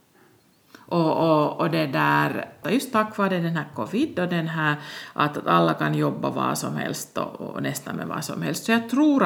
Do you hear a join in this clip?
yes; 1 cut; at 2.6 s

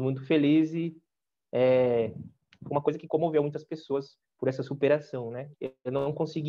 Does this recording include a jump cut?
yes; 1 cut; at 5.5 s

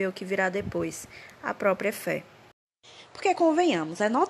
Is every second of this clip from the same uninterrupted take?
yes; 0 cuts

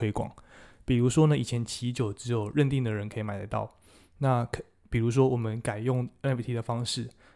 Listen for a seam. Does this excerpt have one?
no; 0 cuts

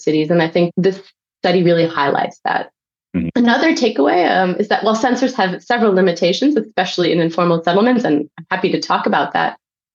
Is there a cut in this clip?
no; 0 cuts

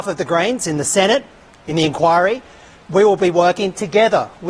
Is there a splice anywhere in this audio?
no; 0 cuts

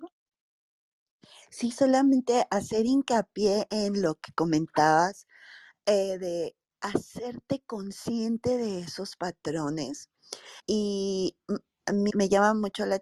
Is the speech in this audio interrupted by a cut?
yes; 2 cuts; at 10.6 s, 12.1 s

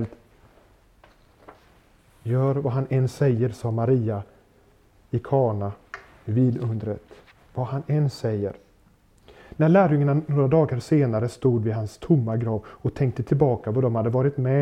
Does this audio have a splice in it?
no; 0 cuts

